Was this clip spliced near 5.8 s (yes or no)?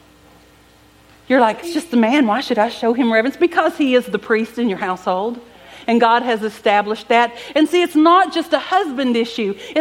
no